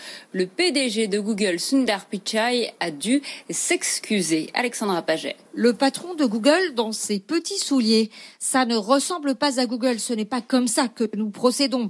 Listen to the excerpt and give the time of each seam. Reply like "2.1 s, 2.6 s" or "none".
5.4 s